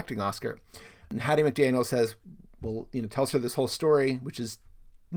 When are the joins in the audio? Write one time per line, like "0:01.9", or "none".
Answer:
none